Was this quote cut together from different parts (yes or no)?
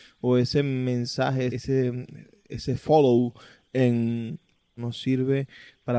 yes